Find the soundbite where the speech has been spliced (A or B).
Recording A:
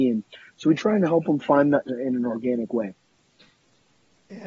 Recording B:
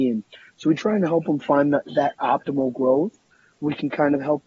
A